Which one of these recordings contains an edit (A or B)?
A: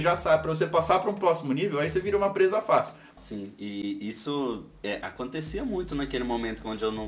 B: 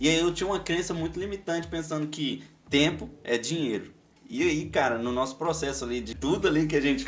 A